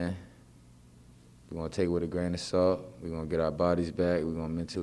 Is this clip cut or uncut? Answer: uncut